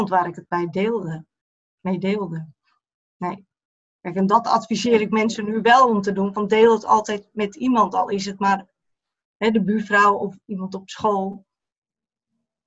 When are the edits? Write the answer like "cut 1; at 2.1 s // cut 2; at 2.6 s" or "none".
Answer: none